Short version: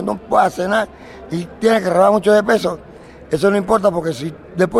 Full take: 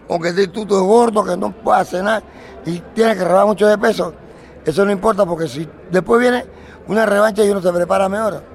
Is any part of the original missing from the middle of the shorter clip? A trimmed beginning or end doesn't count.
no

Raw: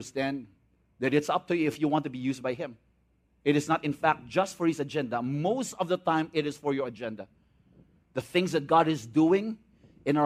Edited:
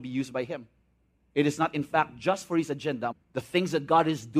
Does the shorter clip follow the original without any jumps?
no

